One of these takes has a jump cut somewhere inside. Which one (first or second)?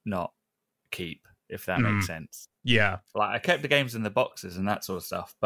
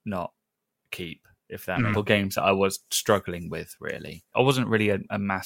second